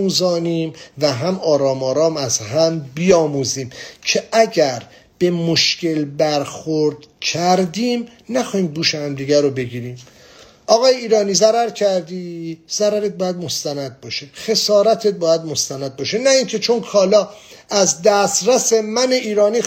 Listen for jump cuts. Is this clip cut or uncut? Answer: uncut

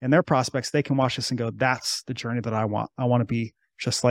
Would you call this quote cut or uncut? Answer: uncut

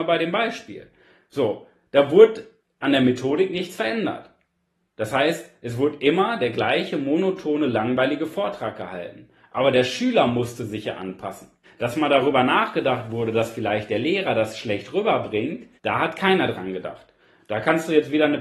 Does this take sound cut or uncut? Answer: cut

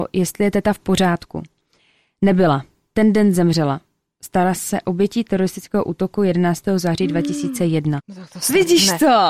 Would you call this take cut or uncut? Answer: cut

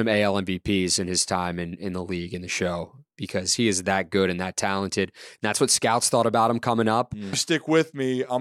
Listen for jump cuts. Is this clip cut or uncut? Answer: cut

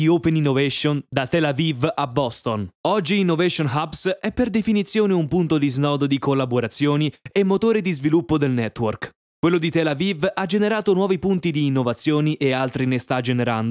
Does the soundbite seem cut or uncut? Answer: cut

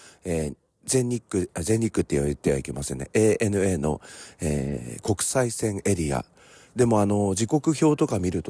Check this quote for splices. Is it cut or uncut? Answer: cut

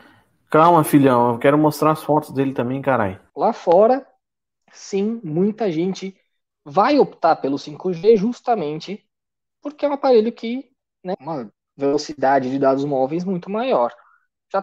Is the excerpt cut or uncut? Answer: cut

